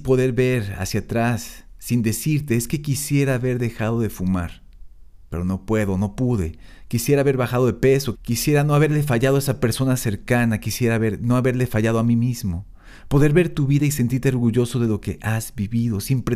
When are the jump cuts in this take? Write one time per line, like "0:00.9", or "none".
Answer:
0:08.1